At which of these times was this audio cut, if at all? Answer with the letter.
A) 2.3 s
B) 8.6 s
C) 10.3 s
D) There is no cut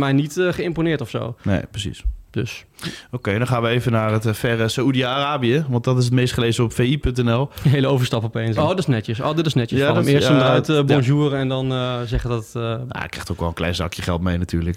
B